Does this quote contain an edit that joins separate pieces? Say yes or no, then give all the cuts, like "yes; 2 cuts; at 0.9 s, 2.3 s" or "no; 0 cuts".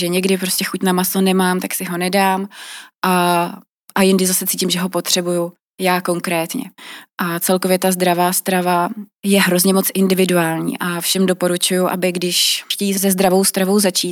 no; 0 cuts